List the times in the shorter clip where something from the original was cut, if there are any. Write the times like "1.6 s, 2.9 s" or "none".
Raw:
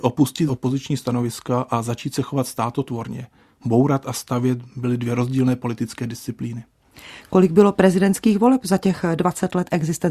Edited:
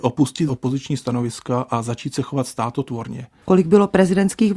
3.4 s